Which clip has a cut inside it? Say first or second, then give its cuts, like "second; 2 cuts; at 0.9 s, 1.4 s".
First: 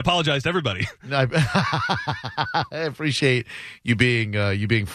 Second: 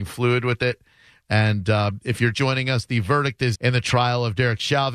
second; 2 cuts; at 2.3 s, 3.5 s